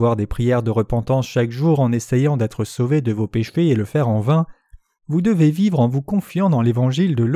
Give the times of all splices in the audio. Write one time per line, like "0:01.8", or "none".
0:05.0